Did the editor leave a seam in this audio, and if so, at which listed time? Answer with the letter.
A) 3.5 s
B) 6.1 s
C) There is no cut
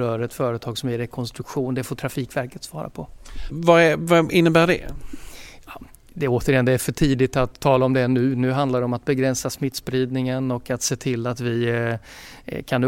A